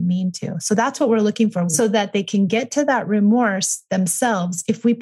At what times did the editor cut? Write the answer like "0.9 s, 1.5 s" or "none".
1.7 s